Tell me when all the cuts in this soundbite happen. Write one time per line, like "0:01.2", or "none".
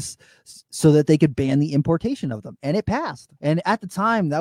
0:03.4